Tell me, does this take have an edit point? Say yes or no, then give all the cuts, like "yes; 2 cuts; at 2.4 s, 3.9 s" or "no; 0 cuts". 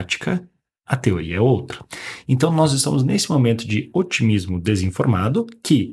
no; 0 cuts